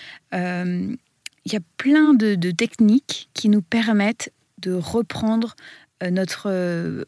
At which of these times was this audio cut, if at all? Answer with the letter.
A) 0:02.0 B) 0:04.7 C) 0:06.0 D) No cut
D